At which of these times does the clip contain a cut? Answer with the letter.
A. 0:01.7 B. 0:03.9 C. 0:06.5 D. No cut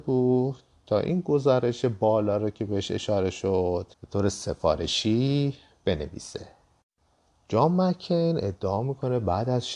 B